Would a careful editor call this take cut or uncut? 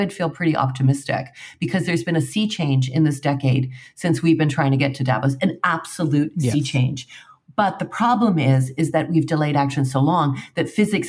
uncut